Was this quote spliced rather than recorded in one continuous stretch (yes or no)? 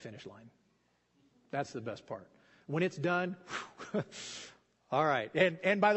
no